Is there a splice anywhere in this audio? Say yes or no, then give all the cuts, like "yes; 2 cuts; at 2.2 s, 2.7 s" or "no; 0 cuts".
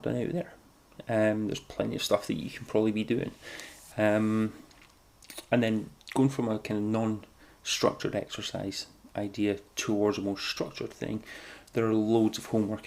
no; 0 cuts